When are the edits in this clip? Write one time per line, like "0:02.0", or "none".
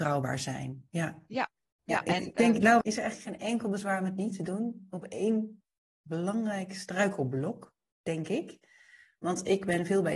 0:02.8